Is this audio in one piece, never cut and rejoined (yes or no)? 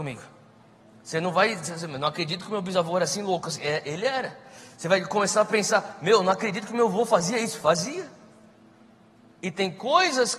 yes